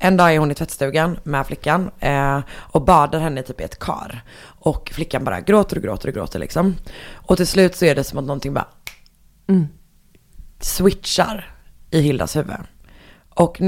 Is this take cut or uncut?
uncut